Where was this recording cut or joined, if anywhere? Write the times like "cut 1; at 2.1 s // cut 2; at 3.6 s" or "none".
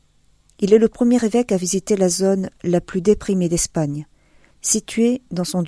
cut 1; at 4.5 s